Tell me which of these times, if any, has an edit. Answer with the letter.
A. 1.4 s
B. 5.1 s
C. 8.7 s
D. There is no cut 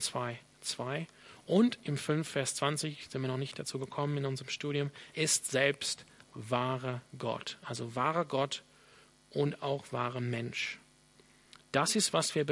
B